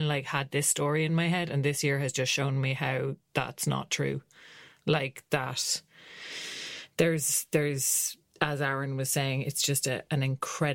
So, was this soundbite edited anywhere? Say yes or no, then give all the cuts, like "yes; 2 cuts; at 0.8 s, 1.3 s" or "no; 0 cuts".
no; 0 cuts